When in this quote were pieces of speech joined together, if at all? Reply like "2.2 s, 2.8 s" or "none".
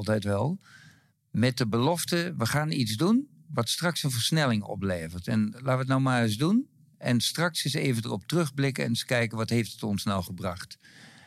none